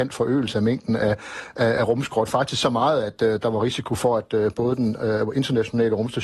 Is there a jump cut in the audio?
no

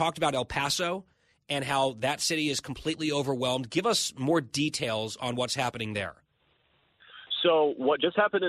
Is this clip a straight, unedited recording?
yes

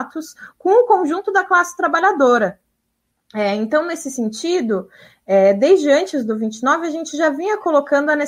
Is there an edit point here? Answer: no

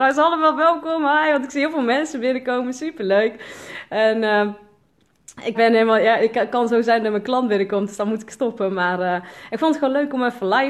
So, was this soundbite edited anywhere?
yes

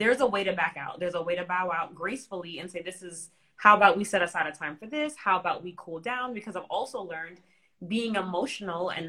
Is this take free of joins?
yes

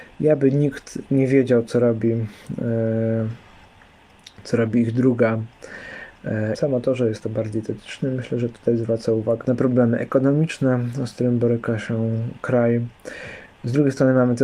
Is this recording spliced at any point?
yes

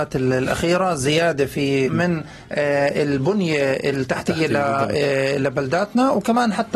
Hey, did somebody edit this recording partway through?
yes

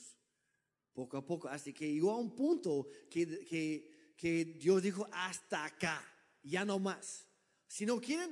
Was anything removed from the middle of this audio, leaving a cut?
no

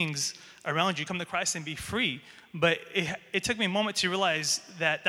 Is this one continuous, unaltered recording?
yes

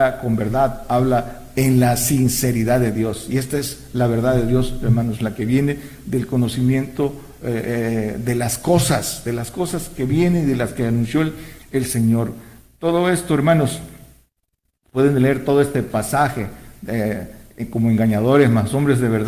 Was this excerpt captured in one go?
yes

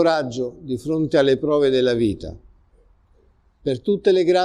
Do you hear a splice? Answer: yes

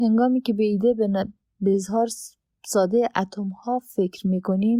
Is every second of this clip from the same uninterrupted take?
yes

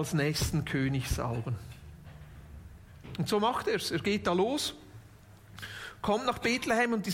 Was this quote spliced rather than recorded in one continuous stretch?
no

